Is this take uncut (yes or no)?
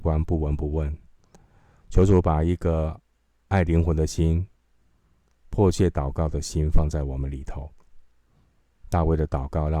yes